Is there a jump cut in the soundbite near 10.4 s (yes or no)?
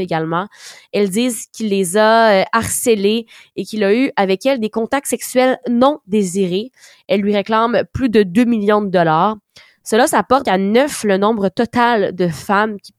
yes